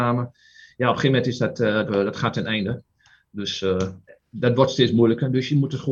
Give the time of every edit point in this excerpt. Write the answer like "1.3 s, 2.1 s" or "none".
1.9 s